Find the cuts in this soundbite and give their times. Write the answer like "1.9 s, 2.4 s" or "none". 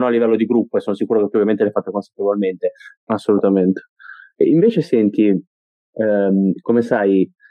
3.0 s